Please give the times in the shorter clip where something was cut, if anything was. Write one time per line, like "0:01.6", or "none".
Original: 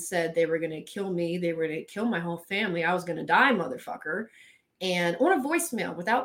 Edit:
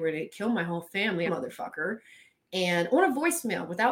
0:01.3